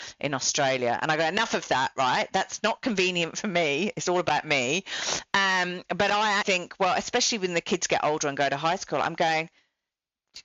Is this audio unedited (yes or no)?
no